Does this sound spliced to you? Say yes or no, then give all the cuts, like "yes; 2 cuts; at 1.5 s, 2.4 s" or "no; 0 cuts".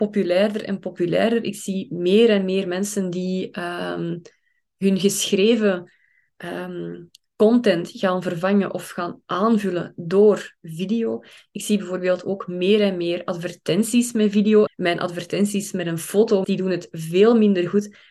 yes; 2 cuts; at 14.7 s, 16.4 s